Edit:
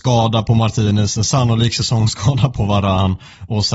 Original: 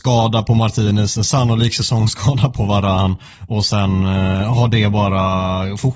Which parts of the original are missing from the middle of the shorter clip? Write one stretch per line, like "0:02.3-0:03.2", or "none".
none